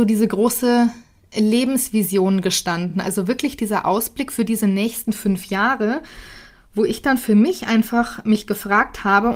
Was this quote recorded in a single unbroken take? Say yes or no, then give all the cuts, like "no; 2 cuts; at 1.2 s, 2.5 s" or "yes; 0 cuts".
yes; 0 cuts